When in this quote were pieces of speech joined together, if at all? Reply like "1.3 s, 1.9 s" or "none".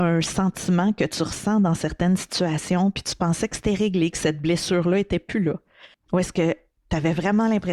5.9 s